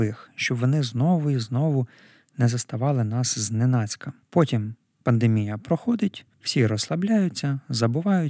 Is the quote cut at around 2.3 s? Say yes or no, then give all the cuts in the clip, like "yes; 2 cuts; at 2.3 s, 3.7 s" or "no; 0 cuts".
no; 2 cuts; at 4.2 s, 6.3 s